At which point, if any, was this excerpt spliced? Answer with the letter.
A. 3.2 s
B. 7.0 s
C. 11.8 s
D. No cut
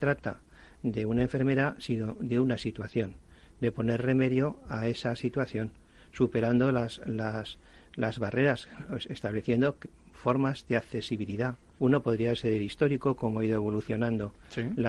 C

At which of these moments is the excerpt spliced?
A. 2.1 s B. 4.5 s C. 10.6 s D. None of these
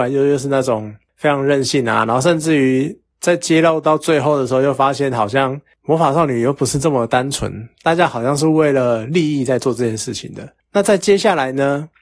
D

